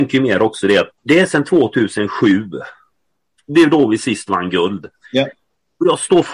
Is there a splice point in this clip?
yes; 1 cut; at 1.0 s

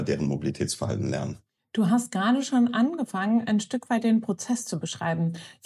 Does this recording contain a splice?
no; 0 cuts

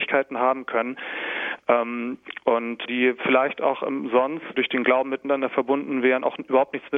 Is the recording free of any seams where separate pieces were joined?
no; 2 cuts; at 2.8 s, 4.5 s

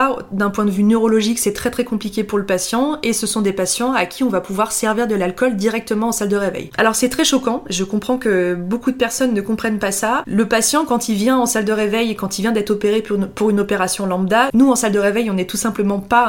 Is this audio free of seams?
yes; 0 cuts

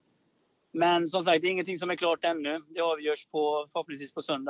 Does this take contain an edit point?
no; 0 cuts

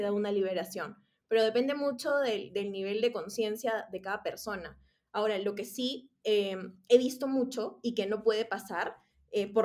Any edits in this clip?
no; 0 cuts

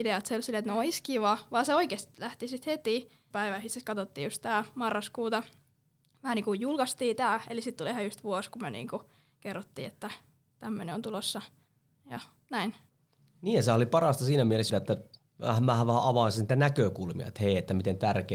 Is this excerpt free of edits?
no; 2 cuts; at 3.3 s, 14.7 s

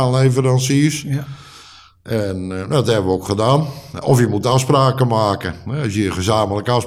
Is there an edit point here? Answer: no; 0 cuts

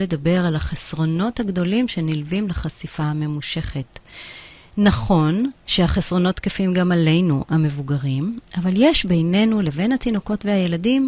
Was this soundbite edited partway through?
yes; 1 cut; at 5.6 s

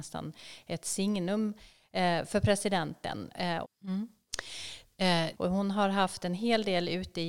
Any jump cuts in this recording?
yes; 2 cuts; at 3.6 s, 5.3 s

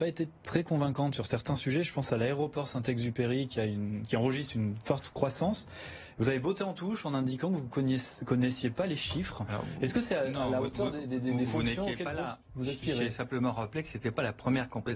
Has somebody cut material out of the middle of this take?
no; 0 cuts

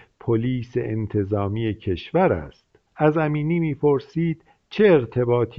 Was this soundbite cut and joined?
yes; 1 cut; at 2.9 s

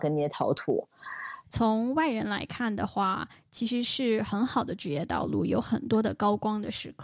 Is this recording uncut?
no; 1 cut; at 1.4 s

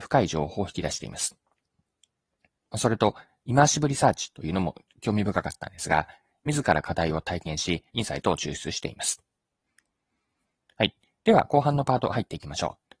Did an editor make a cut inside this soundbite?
yes; 2 cuts; at 6.4 s, 7.9 s

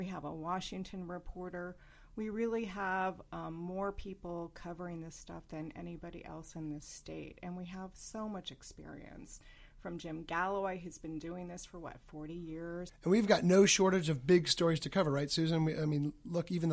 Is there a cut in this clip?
no; 0 cuts

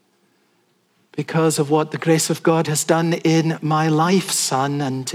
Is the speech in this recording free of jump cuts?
yes; 0 cuts

